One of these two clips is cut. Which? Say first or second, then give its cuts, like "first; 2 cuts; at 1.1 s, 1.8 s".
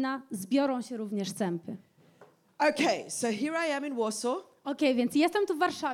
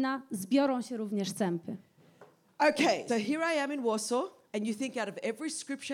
second; 2 cuts; at 3.1 s, 4.5 s